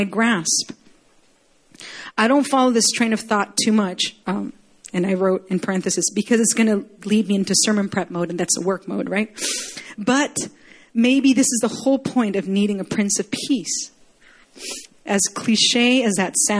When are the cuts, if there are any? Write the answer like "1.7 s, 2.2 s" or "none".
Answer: 4.2 s, 14.9 s